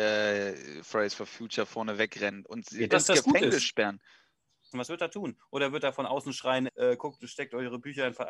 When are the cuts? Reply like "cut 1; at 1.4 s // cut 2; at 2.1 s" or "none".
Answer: cut 1; at 2.9 s // cut 2; at 4.7 s // cut 3; at 6.7 s